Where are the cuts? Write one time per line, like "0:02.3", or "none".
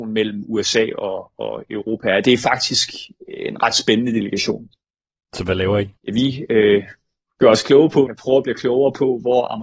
0:06.0
0:08.1